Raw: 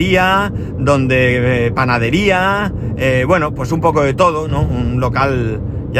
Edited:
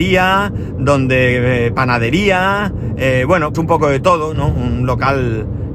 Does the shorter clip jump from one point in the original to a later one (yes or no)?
yes